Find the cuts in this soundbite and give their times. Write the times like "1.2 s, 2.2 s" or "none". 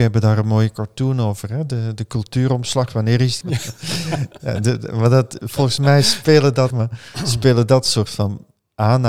3.4 s, 6.7 s